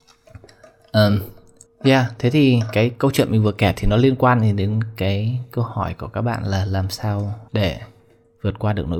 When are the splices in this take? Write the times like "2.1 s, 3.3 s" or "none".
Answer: 1.7 s, 7.5 s